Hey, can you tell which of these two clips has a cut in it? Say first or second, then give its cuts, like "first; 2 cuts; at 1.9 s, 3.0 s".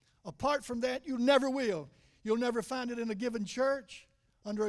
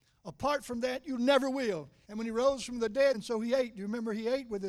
second; 2 cuts; at 2.0 s, 3.1 s